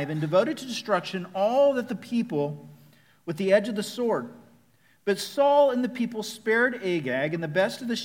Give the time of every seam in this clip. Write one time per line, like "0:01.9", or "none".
none